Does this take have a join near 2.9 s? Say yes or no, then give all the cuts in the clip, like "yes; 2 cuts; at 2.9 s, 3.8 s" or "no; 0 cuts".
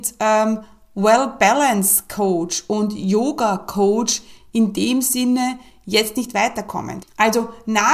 no; 1 cut; at 7.0 s